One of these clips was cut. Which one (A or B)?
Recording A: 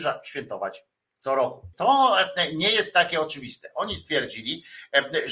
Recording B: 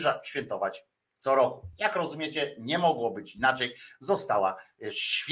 A